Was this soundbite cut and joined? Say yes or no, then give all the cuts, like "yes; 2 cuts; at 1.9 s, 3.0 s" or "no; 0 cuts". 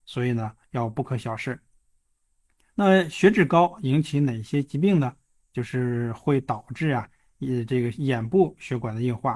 no; 0 cuts